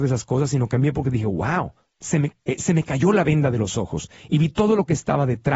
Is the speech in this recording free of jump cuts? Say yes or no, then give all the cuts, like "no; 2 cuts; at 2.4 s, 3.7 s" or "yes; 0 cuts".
no; 1 cut; at 2.3 s